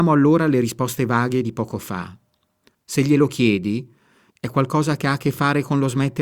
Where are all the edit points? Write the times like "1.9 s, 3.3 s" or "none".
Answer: 2.7 s, 4.3 s